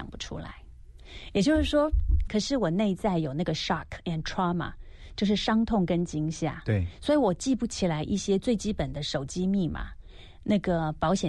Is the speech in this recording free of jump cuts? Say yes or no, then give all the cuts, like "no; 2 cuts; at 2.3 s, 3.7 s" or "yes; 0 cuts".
no; 1 cut; at 2.3 s